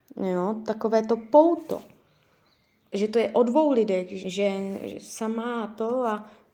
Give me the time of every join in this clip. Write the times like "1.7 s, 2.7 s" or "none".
4.2 s